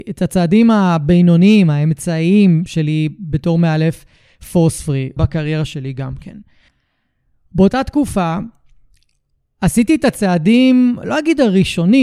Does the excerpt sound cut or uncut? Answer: cut